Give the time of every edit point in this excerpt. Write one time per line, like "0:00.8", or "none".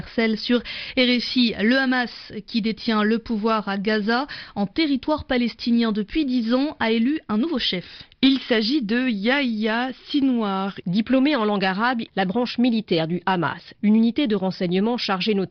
0:10.8
0:12.1
0:13.7